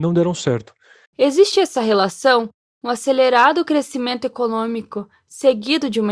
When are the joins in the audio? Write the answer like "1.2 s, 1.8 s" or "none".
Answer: 1.1 s